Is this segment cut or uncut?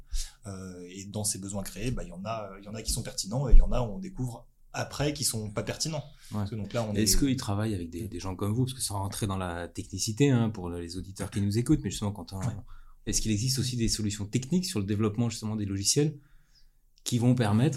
cut